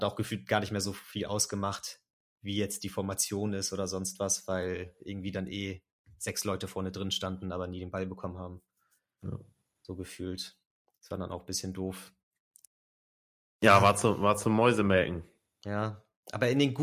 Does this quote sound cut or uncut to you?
uncut